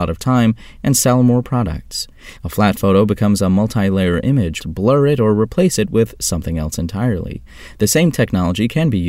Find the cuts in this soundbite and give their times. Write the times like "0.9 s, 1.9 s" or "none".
2.4 s, 4.6 s